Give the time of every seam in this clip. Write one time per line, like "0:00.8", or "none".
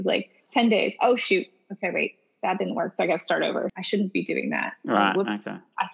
0:03.7